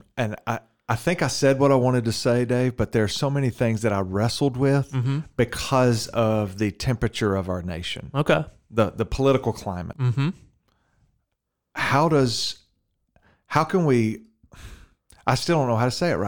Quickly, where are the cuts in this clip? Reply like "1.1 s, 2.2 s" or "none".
9.9 s

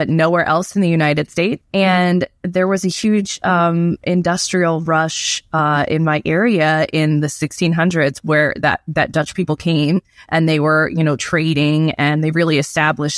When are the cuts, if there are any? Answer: 1.6 s

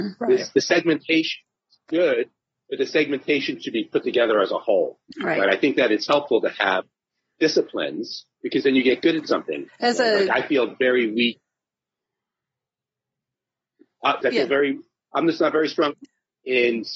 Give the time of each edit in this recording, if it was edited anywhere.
9.7 s, 14.2 s

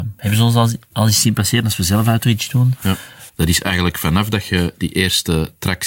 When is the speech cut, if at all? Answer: 3.3 s

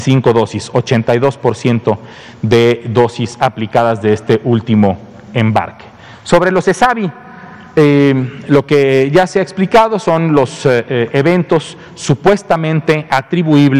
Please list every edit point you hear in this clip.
none

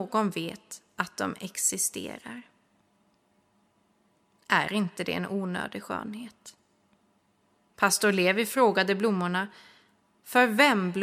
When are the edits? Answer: none

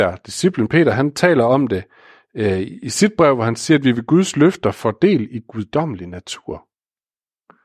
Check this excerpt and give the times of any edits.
none

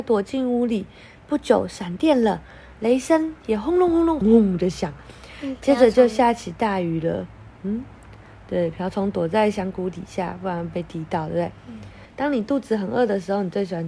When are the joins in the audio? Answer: 4.2 s, 12.1 s

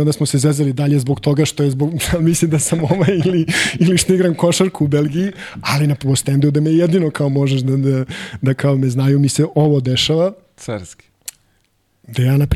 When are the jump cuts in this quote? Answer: none

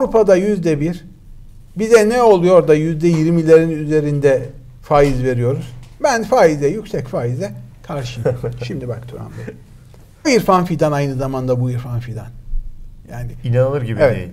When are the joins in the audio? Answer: 10.2 s

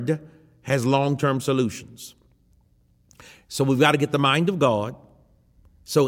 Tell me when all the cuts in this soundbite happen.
none

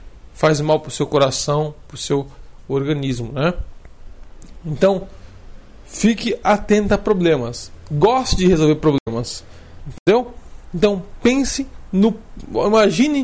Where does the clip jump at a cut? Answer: 9.8 s

